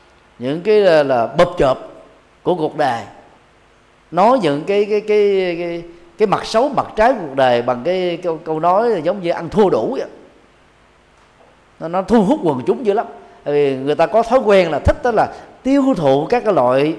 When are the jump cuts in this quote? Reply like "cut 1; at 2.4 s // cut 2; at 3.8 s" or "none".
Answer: none

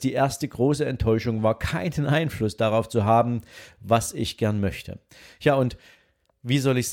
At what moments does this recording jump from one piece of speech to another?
none

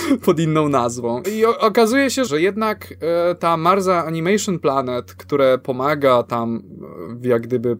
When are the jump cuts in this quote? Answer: cut 1; at 1.2 s // cut 2; at 2.3 s

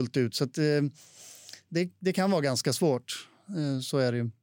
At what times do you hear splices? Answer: none

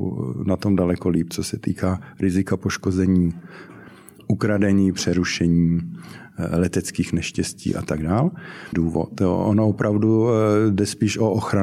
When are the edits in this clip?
cut 1; at 8.7 s

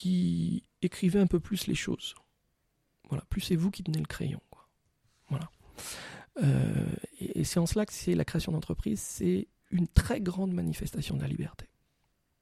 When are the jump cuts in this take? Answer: none

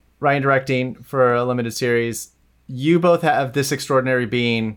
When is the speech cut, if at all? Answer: none

